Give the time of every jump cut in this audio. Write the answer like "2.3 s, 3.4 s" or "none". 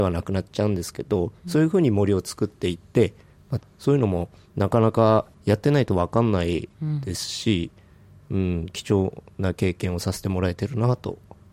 3.6 s, 5.3 s